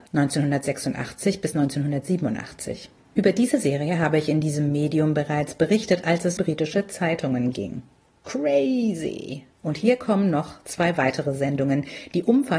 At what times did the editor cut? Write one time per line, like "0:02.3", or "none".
0:06.4
0:08.1
0:09.5